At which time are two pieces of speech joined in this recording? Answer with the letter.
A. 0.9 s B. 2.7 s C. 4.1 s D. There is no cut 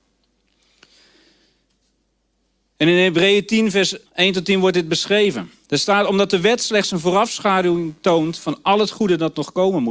C